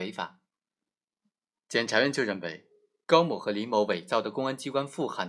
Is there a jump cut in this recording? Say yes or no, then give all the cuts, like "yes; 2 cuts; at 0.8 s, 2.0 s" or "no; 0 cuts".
no; 0 cuts